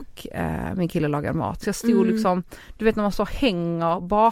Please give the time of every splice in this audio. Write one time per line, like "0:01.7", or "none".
0:01.6